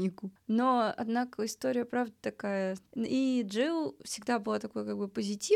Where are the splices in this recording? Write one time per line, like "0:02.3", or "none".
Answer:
0:02.9